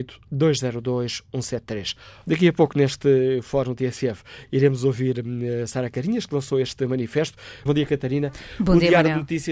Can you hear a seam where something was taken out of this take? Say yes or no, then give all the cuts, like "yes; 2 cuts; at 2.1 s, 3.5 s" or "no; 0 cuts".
yes; 2 cuts; at 2.2 s, 7.7 s